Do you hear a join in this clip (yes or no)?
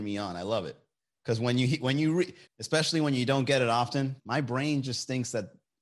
yes